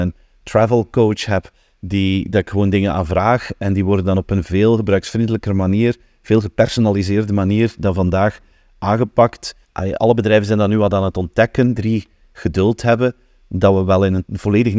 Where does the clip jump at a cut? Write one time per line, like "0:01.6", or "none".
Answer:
0:09.6
0:11.7